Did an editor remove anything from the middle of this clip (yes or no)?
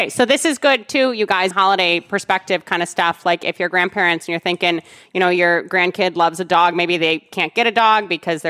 yes